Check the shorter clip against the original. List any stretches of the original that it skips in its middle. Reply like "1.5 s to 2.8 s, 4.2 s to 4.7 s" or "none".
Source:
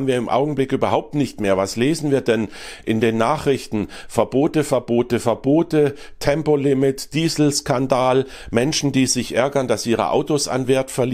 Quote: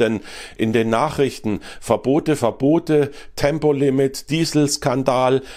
4.6 s to 5.2 s